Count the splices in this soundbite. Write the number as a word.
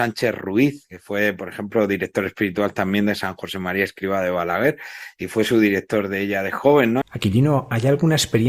one